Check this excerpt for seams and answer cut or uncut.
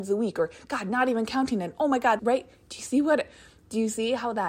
cut